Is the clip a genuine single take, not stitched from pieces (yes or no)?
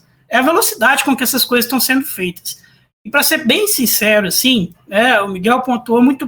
yes